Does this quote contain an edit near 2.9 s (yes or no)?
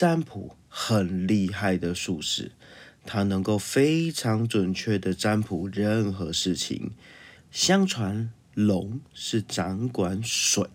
no